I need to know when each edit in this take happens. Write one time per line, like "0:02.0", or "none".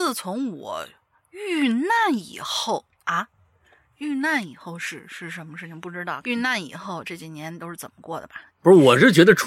0:06.2
0:08.5